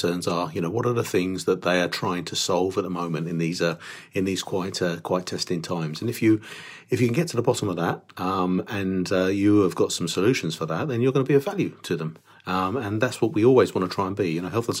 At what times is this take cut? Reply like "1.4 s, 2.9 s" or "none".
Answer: none